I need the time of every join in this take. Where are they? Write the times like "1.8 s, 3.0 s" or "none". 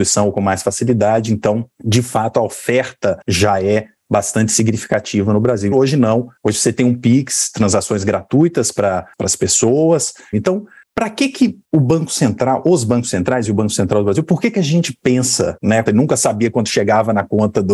5.7 s, 10.3 s, 15.9 s

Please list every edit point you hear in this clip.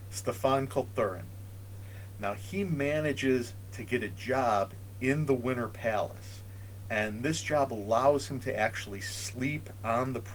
none

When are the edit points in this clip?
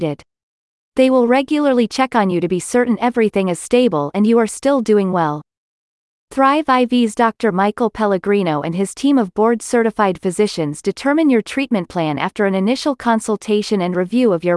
none

